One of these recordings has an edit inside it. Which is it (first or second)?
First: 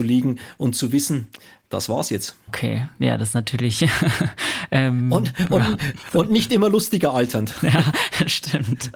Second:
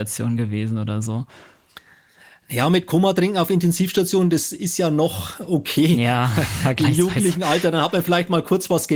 first